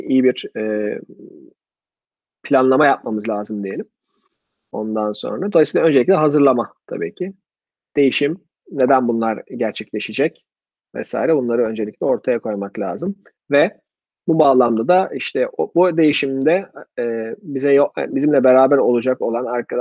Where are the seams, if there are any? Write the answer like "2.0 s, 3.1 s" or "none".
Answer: none